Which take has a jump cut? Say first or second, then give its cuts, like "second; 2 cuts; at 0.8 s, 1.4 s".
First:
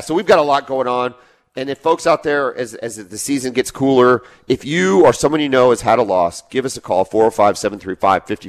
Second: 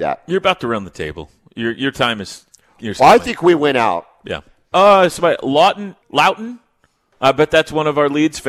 second; 2 cuts; at 4.7 s, 6.0 s